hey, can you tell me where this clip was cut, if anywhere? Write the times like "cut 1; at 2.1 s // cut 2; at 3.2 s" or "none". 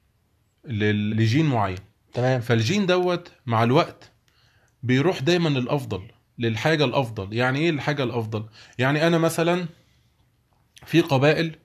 cut 1; at 1.1 s